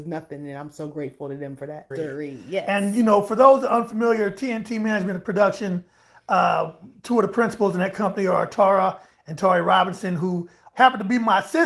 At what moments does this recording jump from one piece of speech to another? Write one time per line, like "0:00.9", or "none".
0:01.9
0:10.7

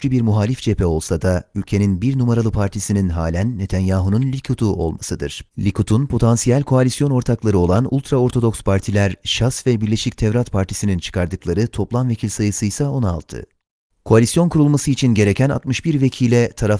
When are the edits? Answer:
0:05.5
0:13.9

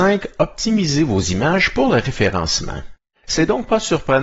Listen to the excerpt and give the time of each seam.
0:03.1

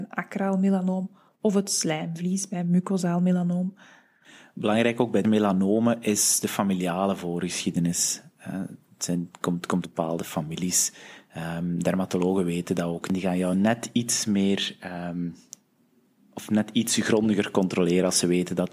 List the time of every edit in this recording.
0:09.8

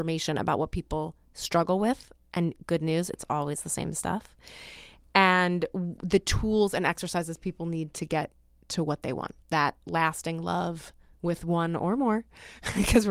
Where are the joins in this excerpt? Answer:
0:09.4

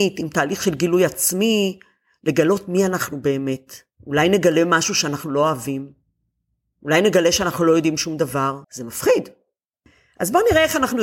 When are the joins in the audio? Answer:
0:08.6

